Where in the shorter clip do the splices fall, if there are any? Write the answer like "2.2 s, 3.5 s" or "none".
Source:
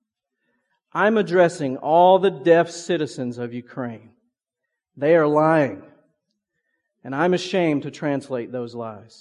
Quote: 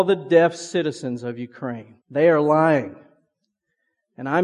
2.0 s